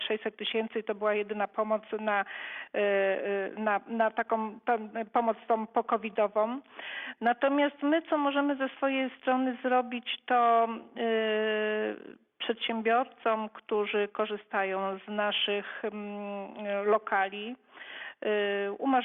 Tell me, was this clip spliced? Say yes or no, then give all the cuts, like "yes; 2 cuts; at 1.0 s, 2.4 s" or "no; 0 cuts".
no; 0 cuts